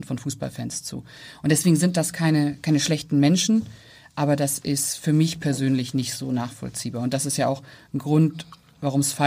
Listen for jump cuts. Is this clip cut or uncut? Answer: uncut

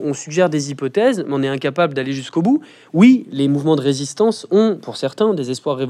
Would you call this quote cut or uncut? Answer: uncut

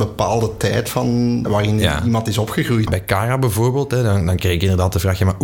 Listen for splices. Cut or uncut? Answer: cut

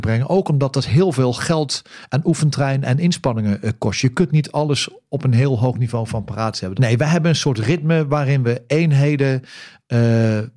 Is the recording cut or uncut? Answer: cut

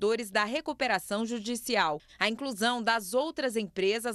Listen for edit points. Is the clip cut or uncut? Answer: cut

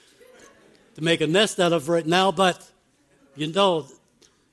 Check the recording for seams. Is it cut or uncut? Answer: uncut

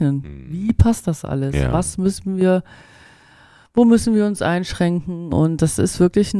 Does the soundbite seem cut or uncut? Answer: uncut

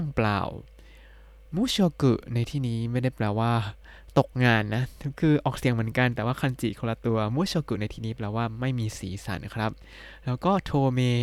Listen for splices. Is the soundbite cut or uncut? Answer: uncut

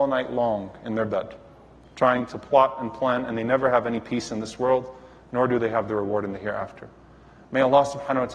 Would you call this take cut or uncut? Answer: uncut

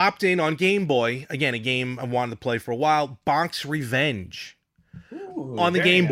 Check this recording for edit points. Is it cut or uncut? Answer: uncut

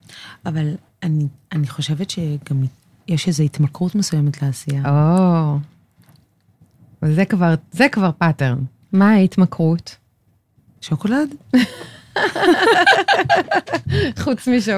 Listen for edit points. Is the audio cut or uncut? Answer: cut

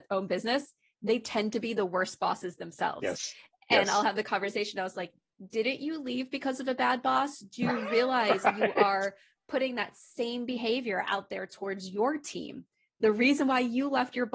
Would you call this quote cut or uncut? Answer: uncut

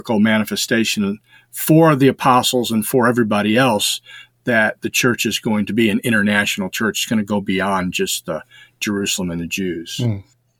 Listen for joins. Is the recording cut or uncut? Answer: uncut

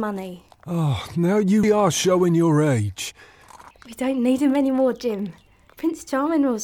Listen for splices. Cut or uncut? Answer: cut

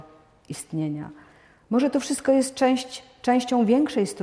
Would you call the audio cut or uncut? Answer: uncut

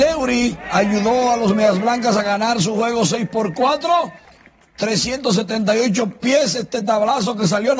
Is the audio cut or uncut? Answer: uncut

